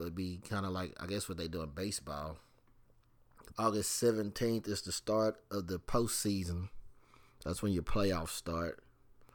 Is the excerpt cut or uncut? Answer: cut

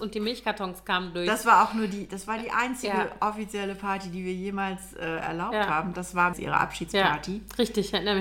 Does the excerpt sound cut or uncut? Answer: cut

